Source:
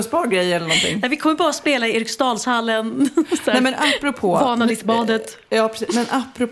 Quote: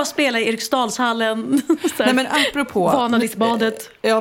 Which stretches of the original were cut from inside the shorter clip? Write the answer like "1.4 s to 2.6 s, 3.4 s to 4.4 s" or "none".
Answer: none